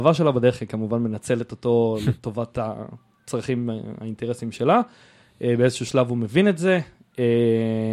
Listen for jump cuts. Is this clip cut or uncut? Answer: uncut